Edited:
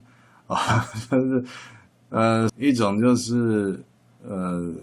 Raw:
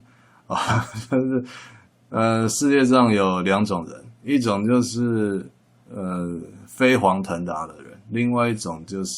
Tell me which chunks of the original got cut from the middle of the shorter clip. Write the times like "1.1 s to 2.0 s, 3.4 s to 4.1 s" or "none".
2.5 s to 4.2 s